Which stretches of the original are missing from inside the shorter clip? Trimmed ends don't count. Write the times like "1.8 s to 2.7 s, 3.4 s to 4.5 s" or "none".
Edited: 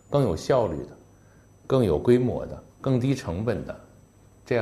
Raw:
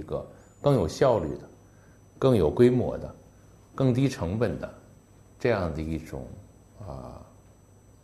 3.2 s to 3.6 s